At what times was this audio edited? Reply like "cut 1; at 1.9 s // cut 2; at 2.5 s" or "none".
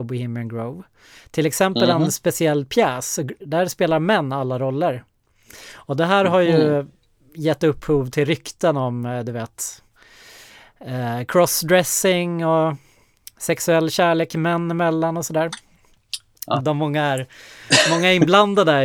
cut 1; at 3.4 s // cut 2; at 16.6 s